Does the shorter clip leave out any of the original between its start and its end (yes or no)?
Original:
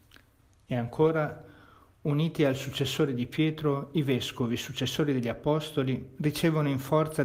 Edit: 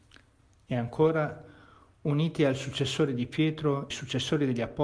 yes